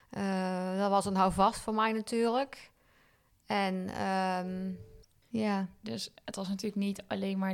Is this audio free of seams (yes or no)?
no